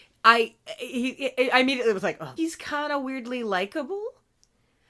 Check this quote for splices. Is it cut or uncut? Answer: cut